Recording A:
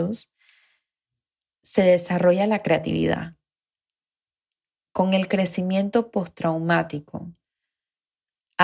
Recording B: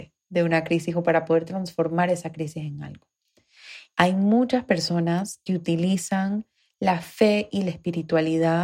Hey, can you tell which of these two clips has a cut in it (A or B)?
B